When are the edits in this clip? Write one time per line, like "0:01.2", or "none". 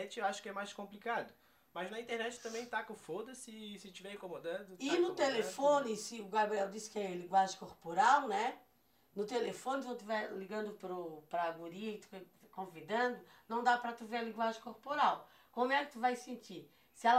none

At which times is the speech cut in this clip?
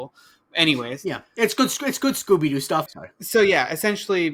0:02.9

